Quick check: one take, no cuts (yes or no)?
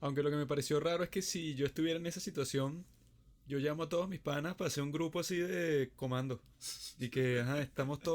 yes